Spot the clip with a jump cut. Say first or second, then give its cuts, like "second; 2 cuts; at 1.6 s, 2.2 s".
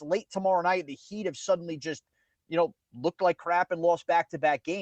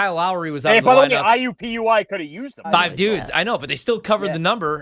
second; 1 cut; at 2.6 s